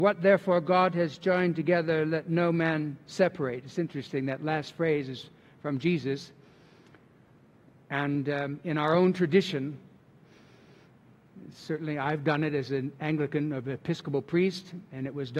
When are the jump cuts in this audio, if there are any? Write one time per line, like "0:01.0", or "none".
none